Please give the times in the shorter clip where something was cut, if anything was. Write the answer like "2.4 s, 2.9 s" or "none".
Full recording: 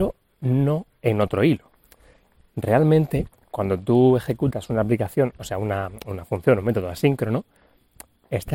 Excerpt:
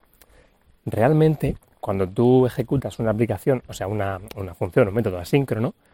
none